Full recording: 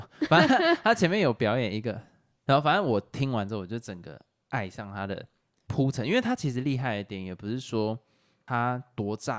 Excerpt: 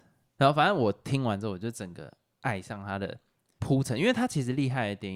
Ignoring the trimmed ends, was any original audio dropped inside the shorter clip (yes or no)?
no